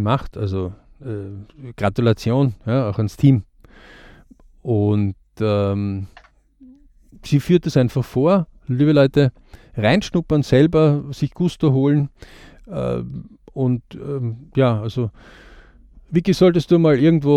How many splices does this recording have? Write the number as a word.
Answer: zero